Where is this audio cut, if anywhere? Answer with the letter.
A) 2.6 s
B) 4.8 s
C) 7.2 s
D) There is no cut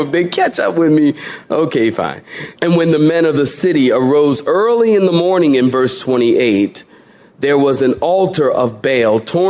A